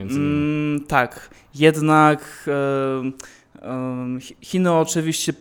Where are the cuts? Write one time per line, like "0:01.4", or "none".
none